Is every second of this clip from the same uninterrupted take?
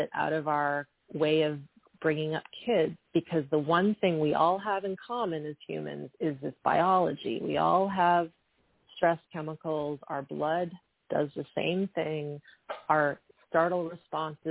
no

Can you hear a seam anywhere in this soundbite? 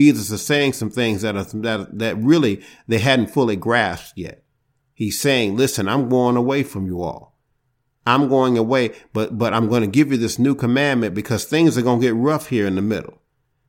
yes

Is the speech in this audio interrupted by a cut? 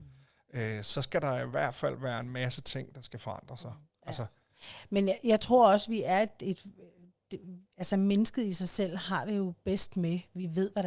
yes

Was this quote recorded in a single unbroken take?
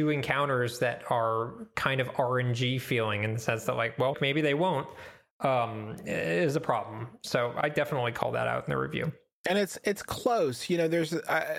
no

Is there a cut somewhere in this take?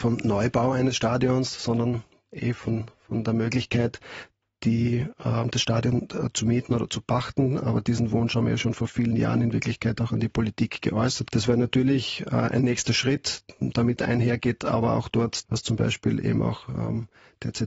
yes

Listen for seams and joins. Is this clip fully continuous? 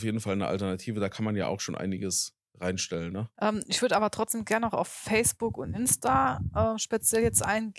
no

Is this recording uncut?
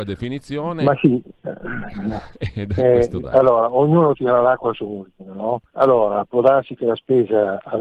no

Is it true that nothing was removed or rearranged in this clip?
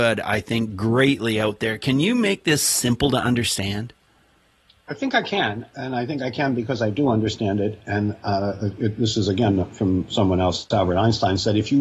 yes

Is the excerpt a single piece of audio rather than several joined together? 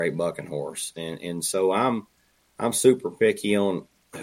no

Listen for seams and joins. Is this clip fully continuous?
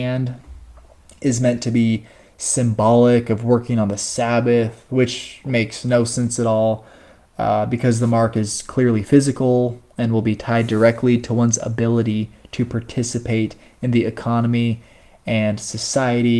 yes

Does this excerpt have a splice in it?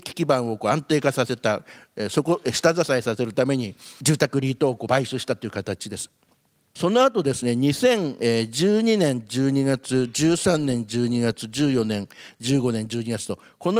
no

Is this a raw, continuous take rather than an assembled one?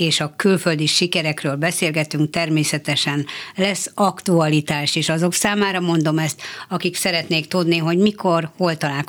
yes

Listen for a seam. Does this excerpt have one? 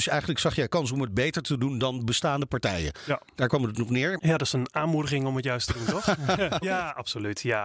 yes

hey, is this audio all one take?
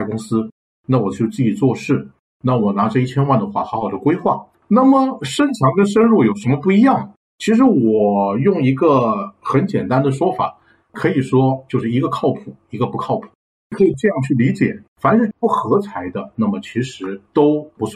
no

